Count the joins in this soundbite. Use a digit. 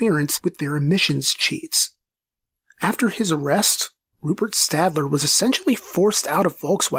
0